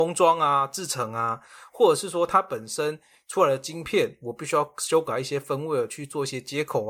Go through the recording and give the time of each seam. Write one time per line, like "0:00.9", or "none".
none